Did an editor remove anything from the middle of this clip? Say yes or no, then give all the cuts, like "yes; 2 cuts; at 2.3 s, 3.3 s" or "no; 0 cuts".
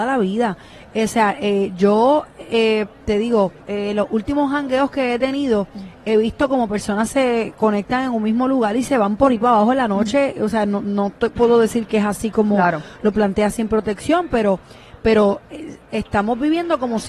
yes; 1 cut; at 3.6 s